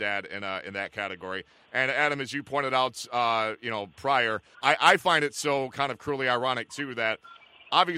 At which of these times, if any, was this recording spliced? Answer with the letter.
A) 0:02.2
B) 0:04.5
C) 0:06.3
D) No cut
B